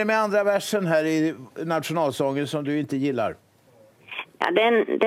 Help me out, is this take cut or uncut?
uncut